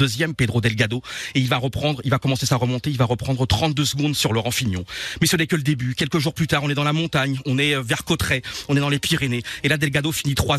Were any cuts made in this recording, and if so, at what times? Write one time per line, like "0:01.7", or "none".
none